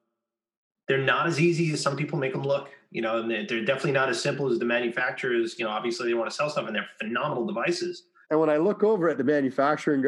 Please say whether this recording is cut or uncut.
cut